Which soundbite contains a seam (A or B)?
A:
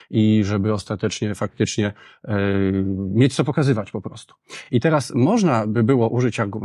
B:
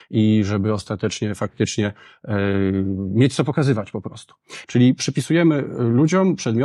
B